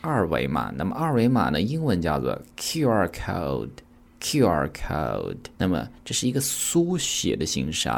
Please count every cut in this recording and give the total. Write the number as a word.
one